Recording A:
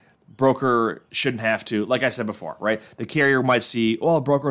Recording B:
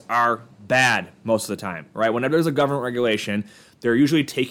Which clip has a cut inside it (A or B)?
A